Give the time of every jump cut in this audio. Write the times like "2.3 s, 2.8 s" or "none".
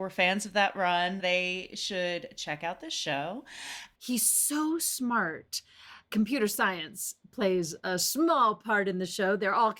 4.0 s